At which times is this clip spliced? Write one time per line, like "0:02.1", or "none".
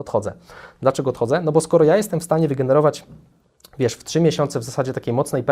none